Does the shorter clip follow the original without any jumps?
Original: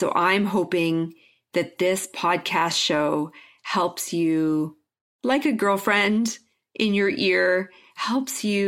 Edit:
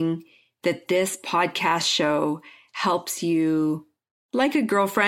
yes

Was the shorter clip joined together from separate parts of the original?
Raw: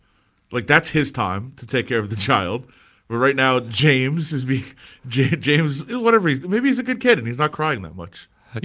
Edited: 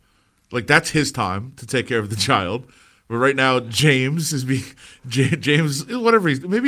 no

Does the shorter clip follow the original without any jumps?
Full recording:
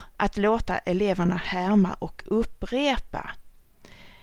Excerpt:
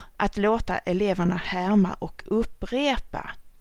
yes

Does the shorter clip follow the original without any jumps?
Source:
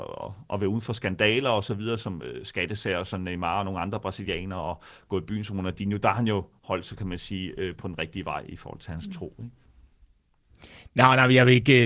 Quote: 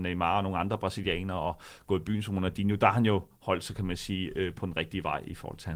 yes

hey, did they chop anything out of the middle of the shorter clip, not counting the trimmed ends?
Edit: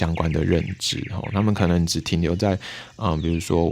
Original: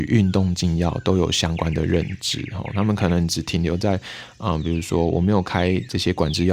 no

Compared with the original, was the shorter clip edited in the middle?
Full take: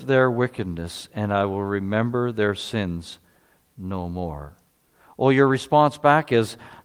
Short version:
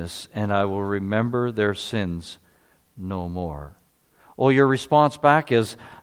no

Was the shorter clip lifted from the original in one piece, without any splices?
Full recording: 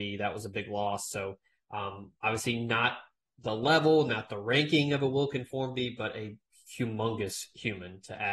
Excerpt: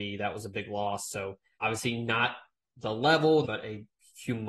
no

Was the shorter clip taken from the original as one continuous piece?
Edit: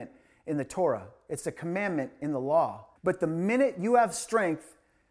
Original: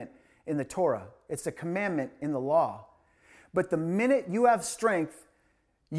no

